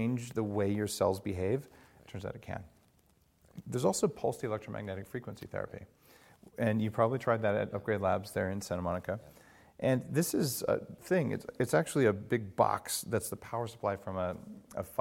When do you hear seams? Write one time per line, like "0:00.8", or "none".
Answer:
none

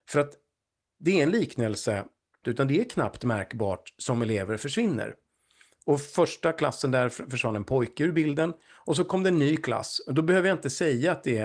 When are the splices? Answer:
0:02.4

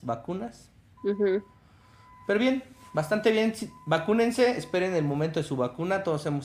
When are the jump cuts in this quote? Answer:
0:01.0

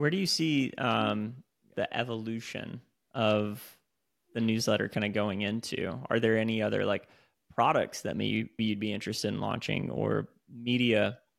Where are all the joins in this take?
0:01.7
0:08.6

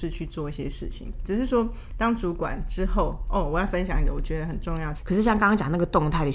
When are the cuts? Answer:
0:04.9

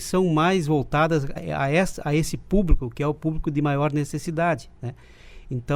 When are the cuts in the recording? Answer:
0:01.4

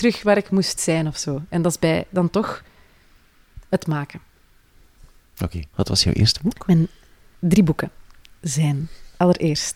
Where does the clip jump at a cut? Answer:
0:05.7

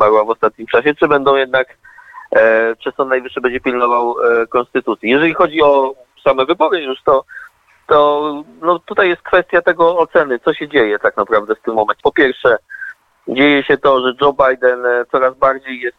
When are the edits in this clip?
0:12.0

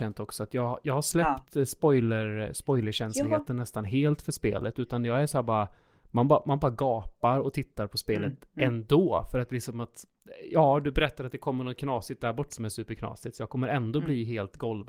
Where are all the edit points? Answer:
0:12.5

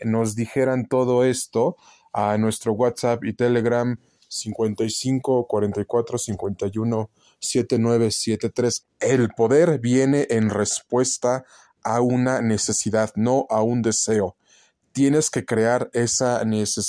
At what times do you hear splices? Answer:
0:08.8

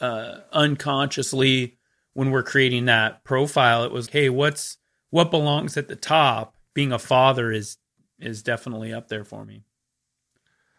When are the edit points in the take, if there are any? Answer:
0:04.1
0:06.7

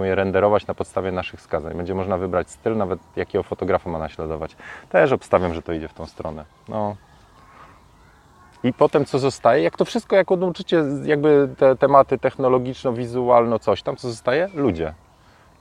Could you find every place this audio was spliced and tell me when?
none

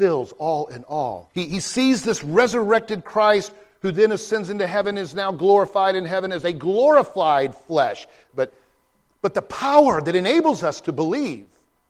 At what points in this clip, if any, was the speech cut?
0:01.3
0:08.3

